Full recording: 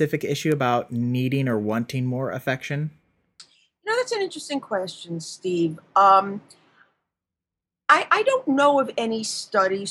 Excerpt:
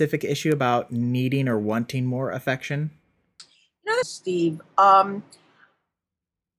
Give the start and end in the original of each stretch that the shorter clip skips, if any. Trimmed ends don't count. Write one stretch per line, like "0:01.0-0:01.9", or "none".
0:04.0-0:05.2